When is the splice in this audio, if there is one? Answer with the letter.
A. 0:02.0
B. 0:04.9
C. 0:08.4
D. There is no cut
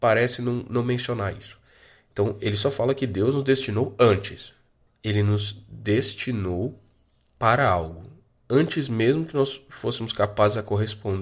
B